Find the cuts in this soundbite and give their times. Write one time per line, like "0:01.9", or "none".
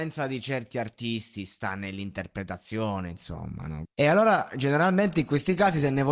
0:03.9